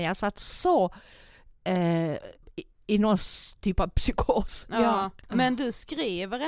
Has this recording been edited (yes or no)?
no